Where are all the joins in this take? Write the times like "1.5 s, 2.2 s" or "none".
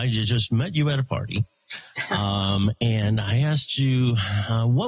none